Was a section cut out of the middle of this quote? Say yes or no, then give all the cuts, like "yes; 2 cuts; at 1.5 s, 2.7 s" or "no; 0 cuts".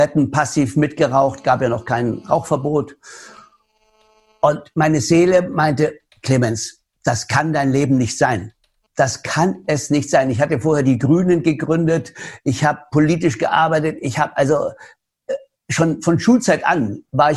no; 0 cuts